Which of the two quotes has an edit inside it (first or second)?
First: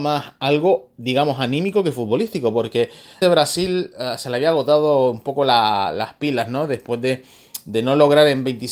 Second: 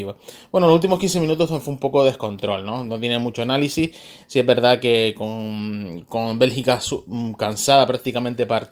first